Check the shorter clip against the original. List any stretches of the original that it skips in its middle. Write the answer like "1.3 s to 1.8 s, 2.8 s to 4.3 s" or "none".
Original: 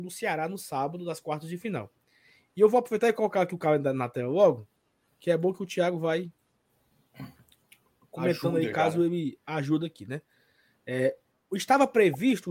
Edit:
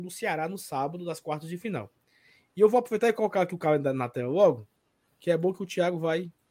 none